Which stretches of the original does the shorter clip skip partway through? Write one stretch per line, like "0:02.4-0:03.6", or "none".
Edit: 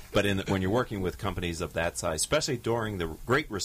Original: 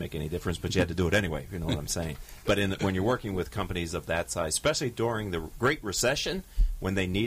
none